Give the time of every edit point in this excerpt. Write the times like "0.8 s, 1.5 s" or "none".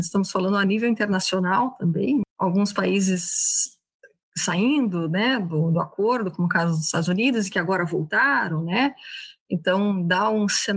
2.2 s